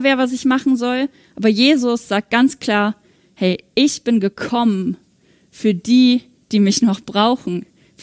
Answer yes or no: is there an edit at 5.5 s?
no